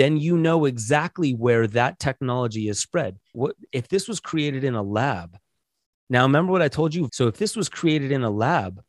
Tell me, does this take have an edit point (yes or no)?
yes